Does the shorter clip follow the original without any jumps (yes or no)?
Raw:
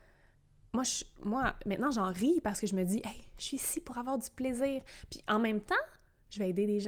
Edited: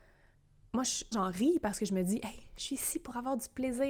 no